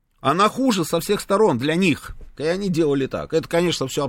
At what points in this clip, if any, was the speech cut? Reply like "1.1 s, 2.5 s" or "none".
2.4 s